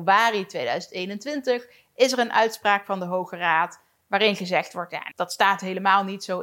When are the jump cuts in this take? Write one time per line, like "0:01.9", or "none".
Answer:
0:05.1